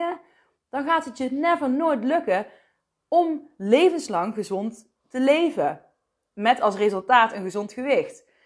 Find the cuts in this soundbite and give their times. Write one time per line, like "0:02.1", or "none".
none